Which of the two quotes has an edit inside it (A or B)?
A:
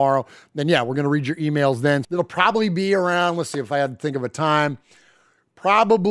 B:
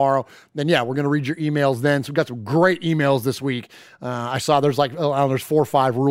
A